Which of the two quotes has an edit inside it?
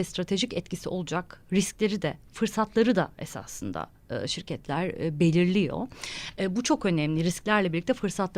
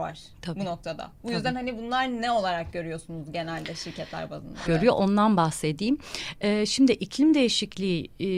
second; 1 cut; at 4.7 s

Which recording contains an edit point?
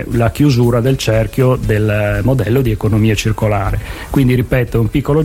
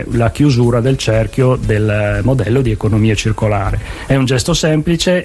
second; 1 cut; at 4.1 s

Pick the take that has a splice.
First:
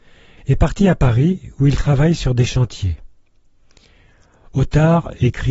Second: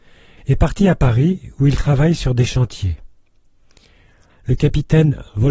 second; 1 cut; at 4.3 s

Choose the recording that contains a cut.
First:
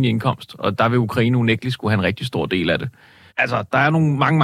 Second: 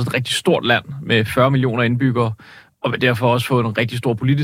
first; 1 cut; at 3.3 s

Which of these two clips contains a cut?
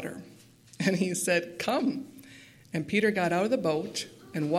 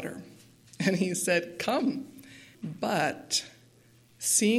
second; 1 cut; at 2.5 s

